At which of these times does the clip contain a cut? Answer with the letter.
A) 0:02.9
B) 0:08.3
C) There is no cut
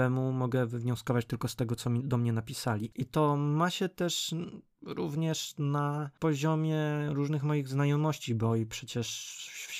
A